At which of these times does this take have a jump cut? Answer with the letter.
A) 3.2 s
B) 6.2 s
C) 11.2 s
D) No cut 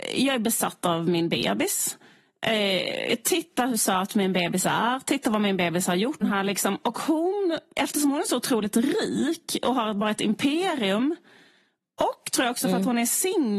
B